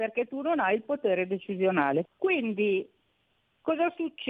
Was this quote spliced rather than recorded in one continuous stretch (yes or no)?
yes